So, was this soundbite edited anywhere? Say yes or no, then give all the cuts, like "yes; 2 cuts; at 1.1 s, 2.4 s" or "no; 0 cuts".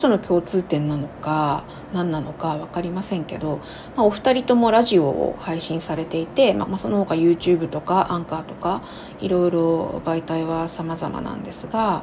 yes; 1 cut; at 6.7 s